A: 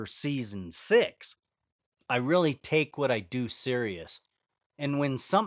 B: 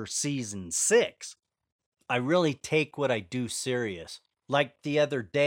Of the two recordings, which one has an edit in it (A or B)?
B